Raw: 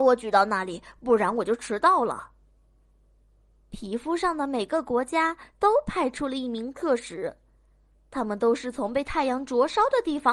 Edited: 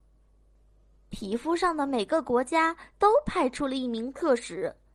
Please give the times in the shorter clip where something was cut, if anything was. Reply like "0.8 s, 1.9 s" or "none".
none